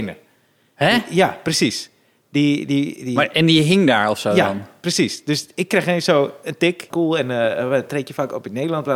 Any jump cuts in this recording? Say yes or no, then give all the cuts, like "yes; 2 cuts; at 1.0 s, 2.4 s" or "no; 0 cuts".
yes; 1 cut; at 6.9 s